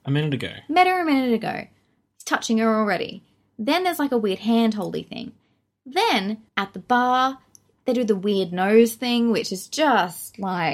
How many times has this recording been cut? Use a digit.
1